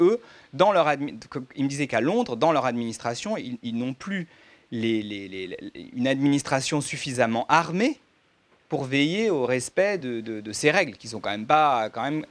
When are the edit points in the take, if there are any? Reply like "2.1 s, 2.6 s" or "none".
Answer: none